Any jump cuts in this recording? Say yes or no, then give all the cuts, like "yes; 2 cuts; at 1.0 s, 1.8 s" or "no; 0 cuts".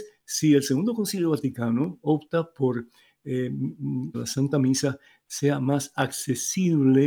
yes; 1 cut; at 4.1 s